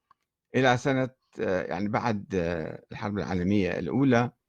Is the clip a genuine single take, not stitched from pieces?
yes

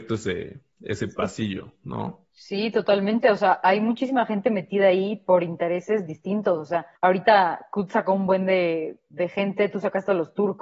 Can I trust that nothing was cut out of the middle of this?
no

